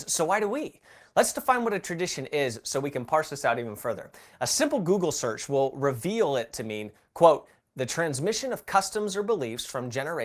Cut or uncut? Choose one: uncut